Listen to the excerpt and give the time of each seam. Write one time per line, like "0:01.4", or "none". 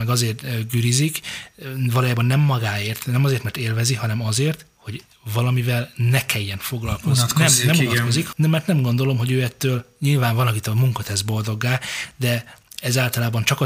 0:08.3